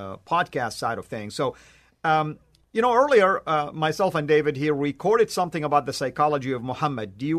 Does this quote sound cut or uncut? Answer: uncut